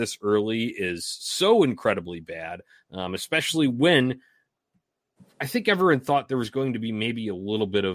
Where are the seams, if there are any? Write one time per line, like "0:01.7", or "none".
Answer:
none